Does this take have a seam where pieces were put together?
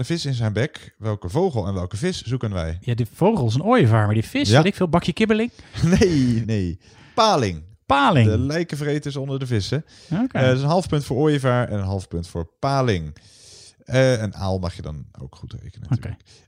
yes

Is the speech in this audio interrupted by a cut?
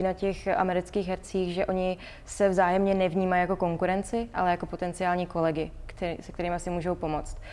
no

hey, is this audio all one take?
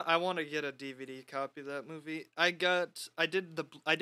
yes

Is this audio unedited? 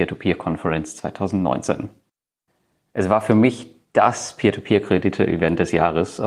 yes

